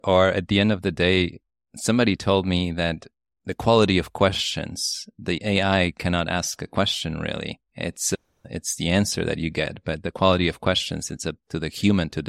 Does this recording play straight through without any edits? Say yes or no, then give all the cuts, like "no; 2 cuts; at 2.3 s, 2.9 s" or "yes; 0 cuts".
yes; 0 cuts